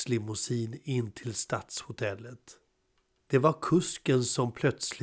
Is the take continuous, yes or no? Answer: no